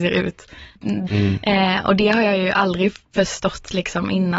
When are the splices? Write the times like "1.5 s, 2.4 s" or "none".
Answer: 1.1 s